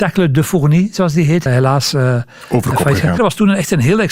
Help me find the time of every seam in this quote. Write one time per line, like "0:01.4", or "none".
0:01.5
0:03.2